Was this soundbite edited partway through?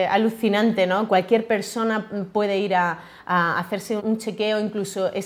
yes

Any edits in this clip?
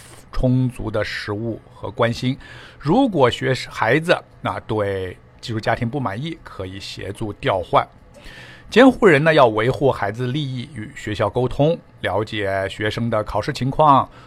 no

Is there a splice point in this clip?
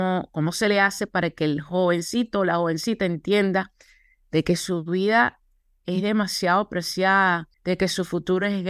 yes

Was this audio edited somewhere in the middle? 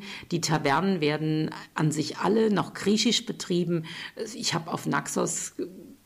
no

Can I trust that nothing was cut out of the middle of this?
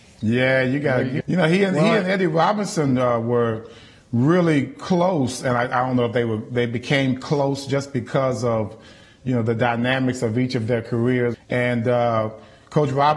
no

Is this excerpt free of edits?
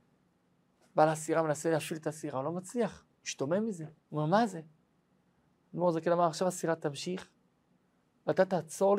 no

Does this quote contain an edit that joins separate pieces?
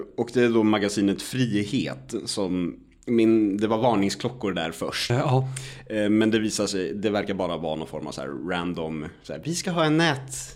yes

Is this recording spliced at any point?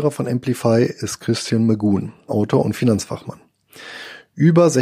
yes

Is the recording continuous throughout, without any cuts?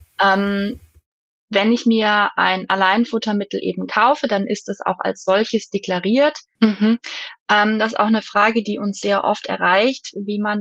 no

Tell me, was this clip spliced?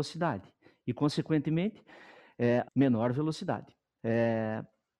yes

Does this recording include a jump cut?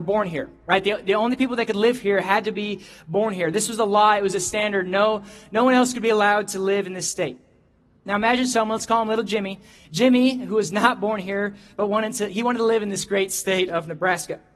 no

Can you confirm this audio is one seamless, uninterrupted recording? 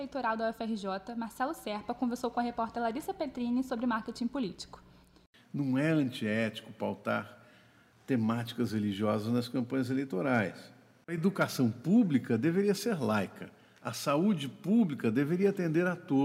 yes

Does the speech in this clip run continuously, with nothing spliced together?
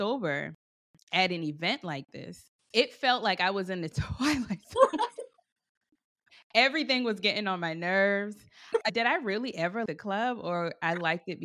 no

